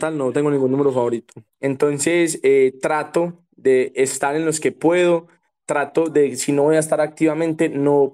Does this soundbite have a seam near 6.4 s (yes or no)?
no